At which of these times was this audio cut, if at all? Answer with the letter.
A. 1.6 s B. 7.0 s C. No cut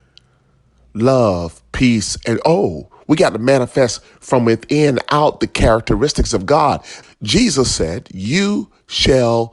B